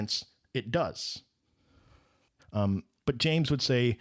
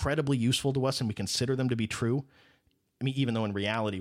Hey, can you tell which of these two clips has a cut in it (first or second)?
first